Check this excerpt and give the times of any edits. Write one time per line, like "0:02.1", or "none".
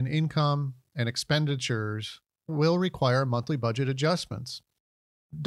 none